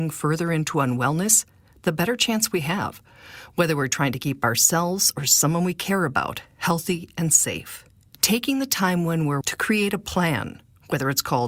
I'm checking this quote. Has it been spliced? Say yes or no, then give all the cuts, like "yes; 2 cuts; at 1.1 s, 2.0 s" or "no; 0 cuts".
yes; 2 cuts; at 8.1 s, 9.4 s